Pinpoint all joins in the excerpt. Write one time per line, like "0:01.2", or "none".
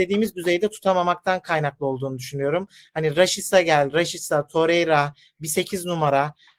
none